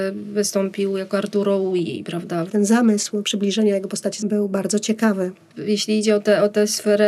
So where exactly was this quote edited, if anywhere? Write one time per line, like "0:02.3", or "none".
0:02.5